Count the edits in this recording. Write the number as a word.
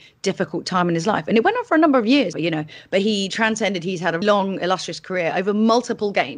two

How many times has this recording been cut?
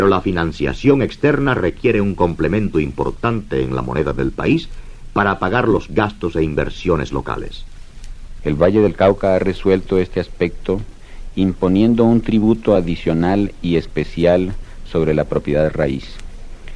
one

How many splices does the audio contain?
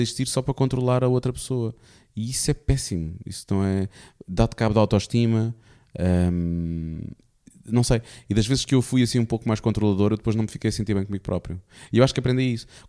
zero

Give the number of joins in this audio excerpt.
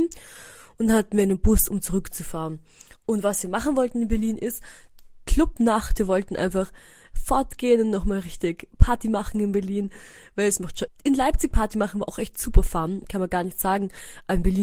one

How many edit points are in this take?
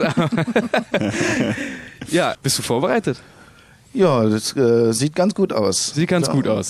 one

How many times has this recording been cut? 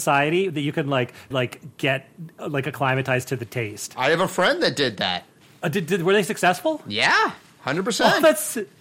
one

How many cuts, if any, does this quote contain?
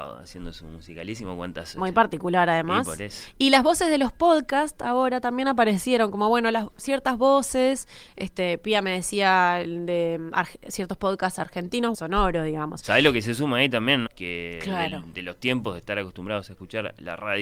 two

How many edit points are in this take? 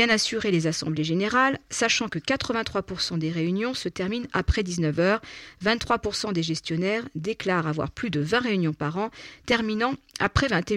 zero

